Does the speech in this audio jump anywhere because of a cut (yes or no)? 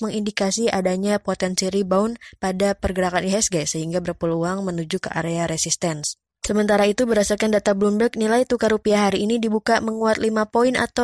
no